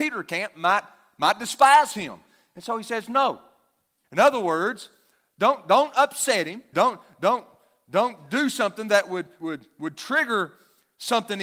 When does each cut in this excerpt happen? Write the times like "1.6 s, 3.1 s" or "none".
4.0 s, 6.7 s, 9.4 s